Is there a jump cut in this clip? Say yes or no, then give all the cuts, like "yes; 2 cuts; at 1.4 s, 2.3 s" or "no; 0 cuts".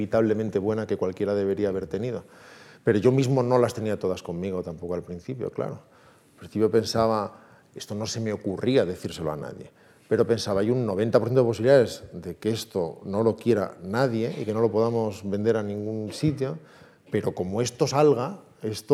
no; 0 cuts